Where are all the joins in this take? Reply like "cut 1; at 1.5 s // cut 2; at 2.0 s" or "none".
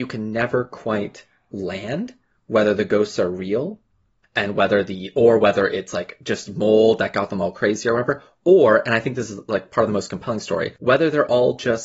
cut 1; at 10.8 s